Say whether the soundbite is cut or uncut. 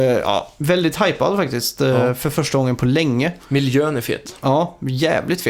uncut